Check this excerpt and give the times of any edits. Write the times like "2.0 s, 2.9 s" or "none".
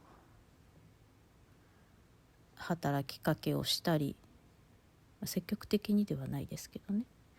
none